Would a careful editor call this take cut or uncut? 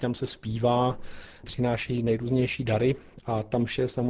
uncut